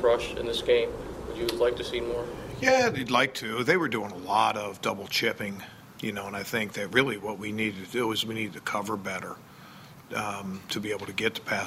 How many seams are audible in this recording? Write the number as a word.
one